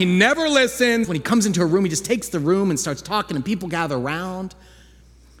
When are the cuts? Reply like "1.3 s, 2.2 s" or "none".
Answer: 1.0 s